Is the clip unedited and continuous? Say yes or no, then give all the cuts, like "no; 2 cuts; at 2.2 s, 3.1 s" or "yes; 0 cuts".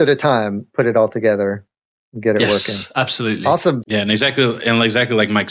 no; 1 cut; at 3.8 s